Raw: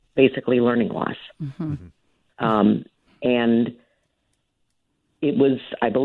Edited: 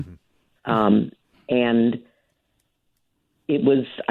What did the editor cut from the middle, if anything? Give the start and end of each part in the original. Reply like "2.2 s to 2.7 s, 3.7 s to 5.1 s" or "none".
none